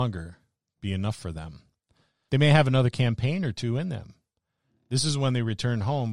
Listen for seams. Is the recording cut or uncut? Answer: cut